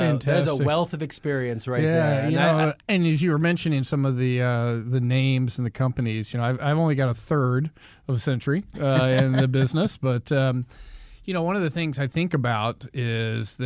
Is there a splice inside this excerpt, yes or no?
no